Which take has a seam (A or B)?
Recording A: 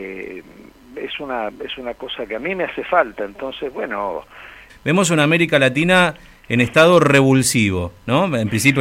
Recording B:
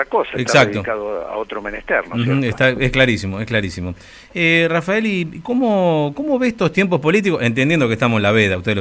A